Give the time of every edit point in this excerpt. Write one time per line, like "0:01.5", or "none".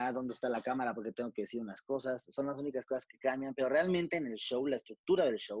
none